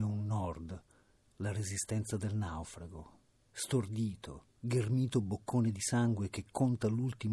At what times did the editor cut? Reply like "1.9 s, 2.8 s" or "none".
3.3 s, 4.6 s